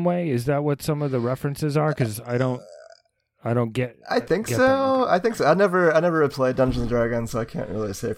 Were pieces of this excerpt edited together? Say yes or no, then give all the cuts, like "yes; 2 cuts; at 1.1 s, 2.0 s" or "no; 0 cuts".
no; 0 cuts